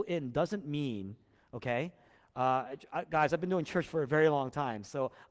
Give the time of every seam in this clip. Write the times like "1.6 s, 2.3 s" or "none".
none